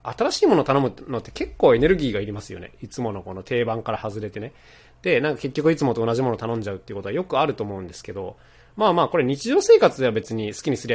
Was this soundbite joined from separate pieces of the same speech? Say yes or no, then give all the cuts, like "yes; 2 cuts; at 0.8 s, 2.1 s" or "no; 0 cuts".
no; 0 cuts